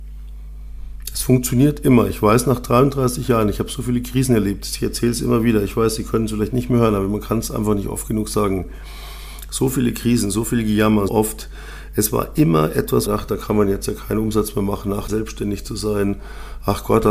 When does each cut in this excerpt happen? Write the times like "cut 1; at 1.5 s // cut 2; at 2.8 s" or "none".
cut 1; at 11.1 s // cut 2; at 13.1 s // cut 3; at 15.1 s